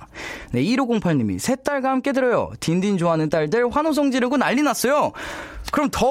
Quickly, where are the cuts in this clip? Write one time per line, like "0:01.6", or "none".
none